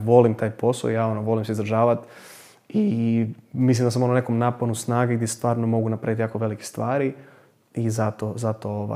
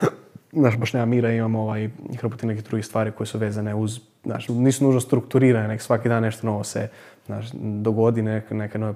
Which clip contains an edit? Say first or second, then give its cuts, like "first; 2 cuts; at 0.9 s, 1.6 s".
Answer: second; 1 cut; at 4.5 s